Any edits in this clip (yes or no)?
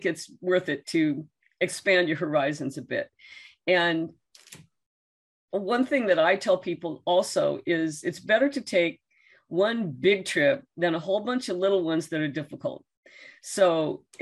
no